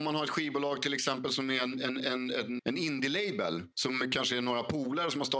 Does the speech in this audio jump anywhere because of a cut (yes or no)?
yes